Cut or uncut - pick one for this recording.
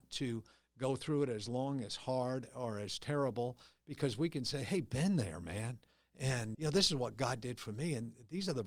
cut